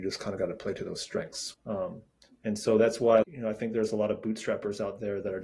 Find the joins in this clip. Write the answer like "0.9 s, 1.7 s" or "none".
1.5 s, 3.2 s